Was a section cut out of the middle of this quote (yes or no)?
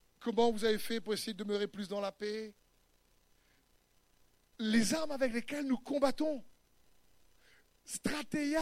no